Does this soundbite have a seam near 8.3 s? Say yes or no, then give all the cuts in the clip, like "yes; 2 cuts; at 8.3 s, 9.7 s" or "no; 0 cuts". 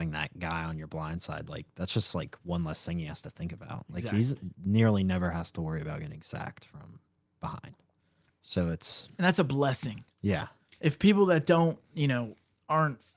yes; 1 cut; at 8.3 s